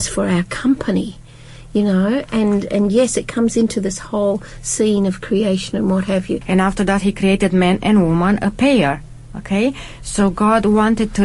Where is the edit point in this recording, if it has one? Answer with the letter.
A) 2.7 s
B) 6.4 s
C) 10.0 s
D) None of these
B